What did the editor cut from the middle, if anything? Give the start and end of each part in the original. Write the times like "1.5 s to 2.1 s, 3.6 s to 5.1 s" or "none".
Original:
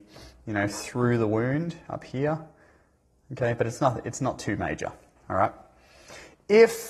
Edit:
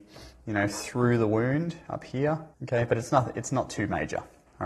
2.5 s to 3.2 s